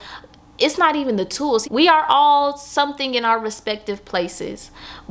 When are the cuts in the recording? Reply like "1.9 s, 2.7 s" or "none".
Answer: 1.6 s